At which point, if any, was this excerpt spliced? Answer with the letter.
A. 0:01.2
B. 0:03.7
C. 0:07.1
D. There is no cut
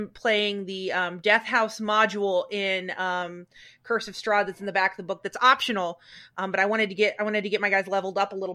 D